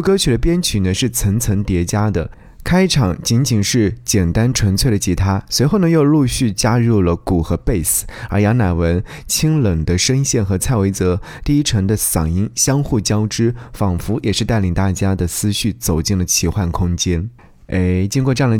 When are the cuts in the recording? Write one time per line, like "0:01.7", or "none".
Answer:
none

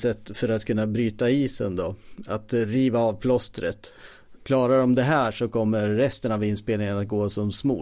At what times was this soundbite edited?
none

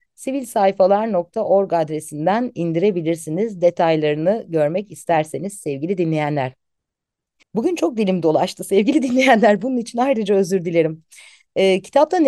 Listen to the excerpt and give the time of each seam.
0:07.4

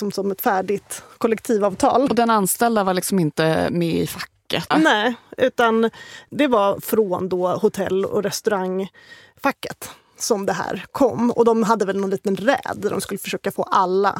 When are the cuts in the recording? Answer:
0:02.1
0:04.7

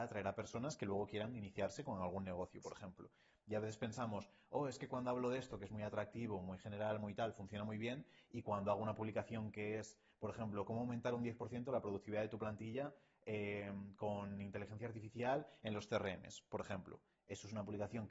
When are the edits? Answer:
none

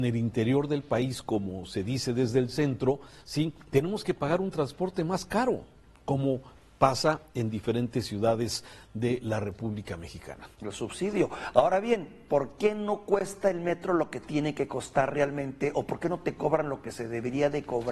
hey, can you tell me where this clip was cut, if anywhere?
0:10.5

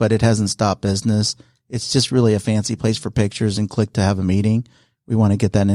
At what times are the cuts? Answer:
none

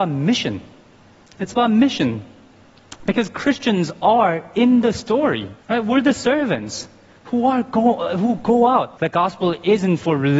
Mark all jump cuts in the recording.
0:05.6
0:09.0

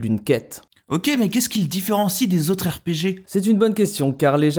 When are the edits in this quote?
none

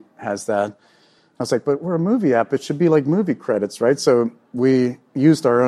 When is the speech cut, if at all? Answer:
none

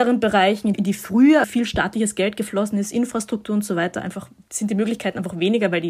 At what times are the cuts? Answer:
0:01.4

